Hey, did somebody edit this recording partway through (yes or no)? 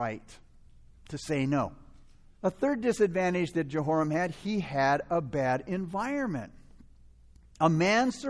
yes